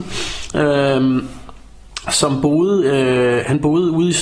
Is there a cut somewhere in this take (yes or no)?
no